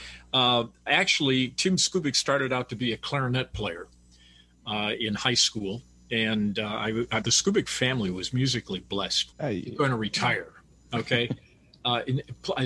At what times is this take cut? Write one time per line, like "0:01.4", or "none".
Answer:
0:07.2
0:09.3